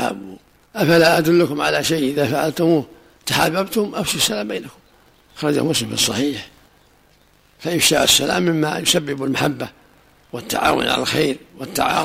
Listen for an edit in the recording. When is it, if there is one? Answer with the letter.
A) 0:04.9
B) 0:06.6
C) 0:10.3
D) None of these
D